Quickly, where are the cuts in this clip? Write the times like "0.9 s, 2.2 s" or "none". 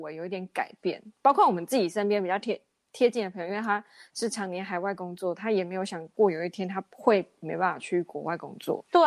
none